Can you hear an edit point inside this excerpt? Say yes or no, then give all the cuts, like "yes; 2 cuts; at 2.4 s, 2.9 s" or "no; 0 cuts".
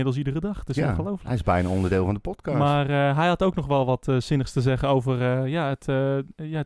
no; 0 cuts